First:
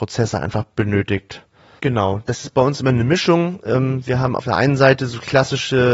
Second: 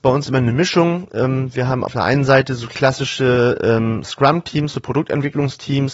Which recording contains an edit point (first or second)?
first